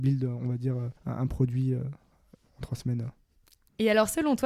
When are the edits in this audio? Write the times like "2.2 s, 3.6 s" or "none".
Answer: 1.0 s